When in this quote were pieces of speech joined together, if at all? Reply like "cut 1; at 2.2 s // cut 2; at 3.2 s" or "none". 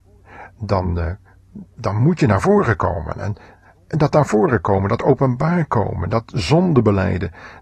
cut 1; at 1.7 s